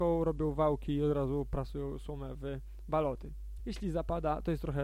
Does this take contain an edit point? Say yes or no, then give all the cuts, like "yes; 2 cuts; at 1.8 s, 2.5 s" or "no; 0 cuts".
yes; 1 cut; at 3.6 s